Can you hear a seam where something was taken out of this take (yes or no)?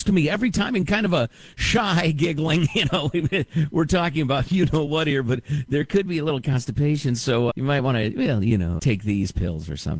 yes